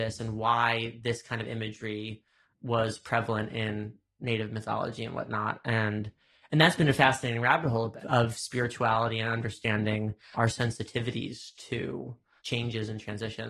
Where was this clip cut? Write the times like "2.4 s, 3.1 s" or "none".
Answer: none